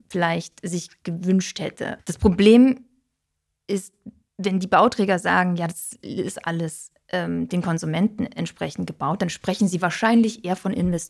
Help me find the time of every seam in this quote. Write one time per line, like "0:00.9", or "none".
0:02.0